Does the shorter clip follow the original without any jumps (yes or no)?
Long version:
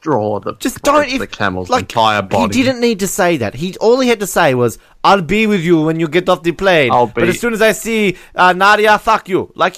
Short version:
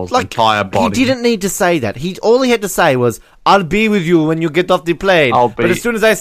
yes